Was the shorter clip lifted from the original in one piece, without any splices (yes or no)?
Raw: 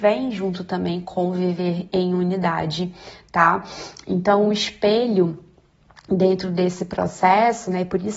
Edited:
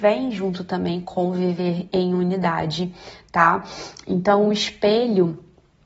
yes